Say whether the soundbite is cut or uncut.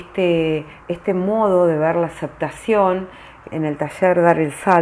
cut